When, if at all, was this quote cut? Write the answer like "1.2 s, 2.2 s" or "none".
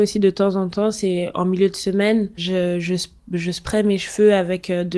2.4 s